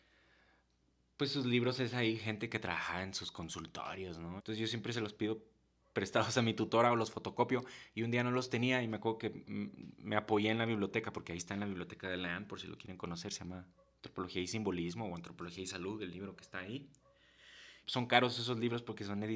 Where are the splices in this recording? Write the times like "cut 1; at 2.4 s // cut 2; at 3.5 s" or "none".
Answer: cut 1; at 4.4 s // cut 2; at 9.4 s // cut 3; at 17.8 s